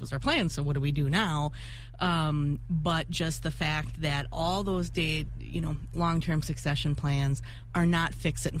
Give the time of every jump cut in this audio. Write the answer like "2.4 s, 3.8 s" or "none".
5.9 s